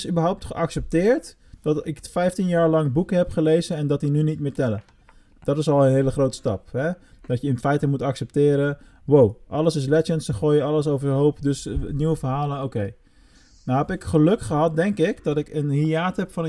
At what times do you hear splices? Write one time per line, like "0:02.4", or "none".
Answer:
none